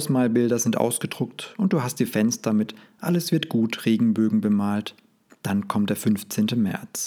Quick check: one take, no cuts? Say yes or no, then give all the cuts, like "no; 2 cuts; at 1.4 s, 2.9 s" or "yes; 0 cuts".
yes; 0 cuts